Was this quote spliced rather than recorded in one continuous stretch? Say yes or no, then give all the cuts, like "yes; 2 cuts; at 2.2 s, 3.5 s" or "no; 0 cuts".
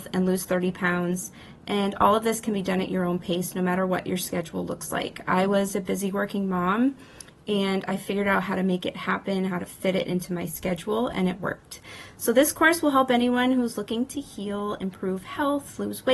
no; 0 cuts